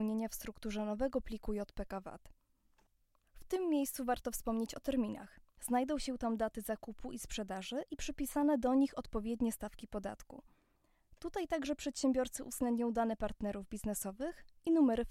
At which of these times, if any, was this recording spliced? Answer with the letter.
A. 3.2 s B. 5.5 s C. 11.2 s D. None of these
B